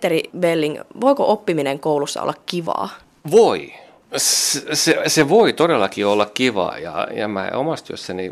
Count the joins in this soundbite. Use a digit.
0